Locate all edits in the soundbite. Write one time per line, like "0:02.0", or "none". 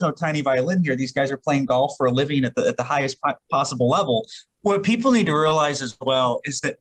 0:04.5